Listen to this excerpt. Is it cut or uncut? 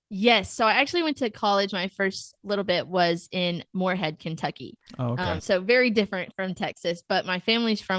uncut